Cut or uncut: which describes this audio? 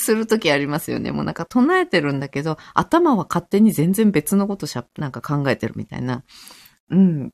uncut